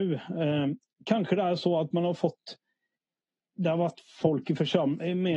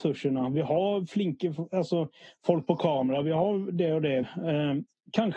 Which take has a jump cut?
second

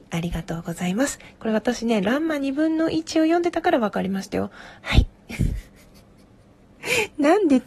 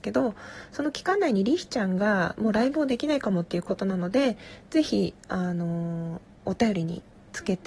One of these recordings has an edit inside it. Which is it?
first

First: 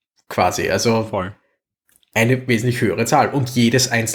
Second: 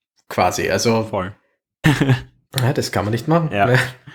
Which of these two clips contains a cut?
second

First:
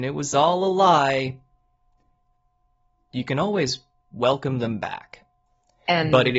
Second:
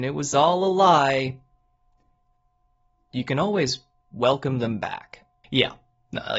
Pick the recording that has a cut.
second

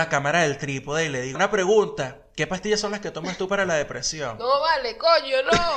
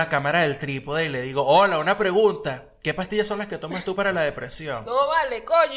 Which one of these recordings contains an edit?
first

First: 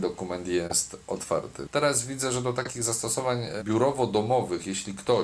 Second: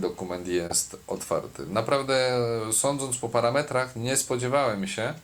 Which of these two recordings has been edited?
first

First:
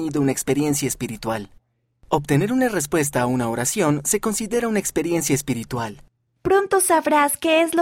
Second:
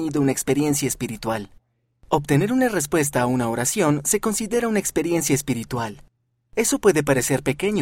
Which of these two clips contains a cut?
first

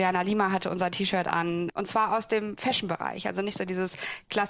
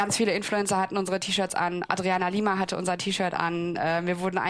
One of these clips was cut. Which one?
first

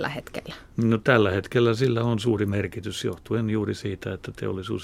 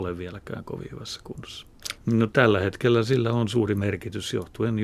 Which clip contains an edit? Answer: second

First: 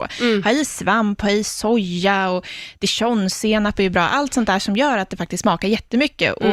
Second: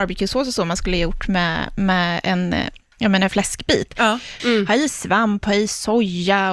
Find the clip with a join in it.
second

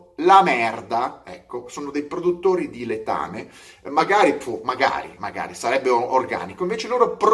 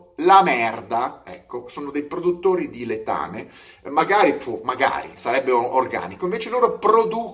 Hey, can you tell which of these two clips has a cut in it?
second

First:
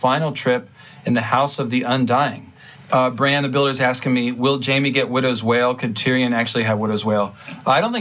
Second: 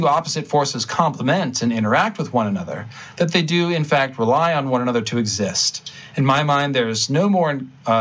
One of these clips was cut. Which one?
first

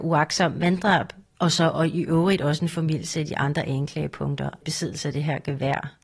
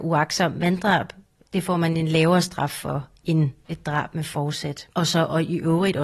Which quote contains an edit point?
first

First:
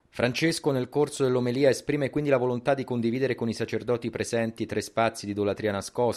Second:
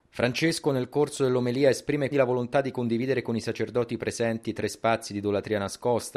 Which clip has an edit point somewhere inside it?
second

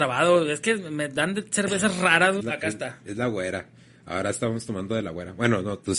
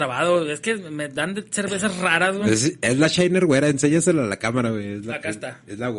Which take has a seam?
first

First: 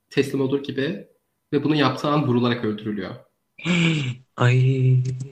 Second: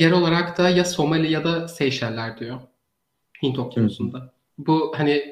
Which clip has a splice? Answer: first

